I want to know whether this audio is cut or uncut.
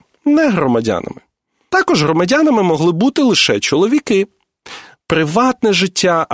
cut